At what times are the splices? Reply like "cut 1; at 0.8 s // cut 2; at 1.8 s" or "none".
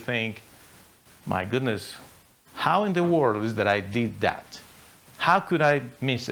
none